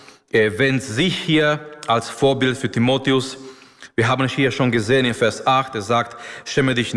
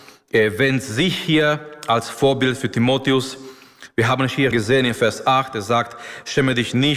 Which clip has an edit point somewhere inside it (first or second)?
second